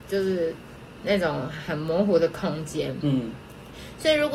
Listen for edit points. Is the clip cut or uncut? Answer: cut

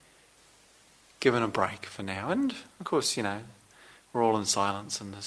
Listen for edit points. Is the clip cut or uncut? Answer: uncut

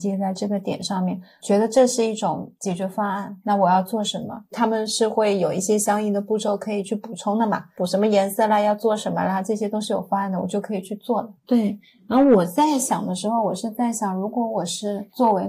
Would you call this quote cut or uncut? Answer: cut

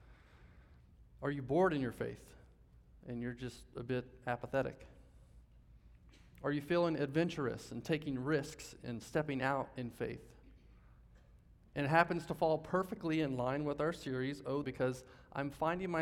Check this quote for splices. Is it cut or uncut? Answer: cut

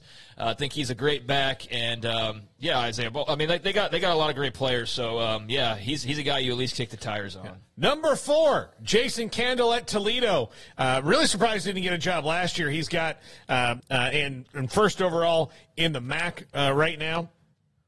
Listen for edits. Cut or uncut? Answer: cut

